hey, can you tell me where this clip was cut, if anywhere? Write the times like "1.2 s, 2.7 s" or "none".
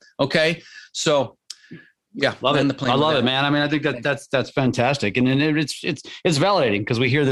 none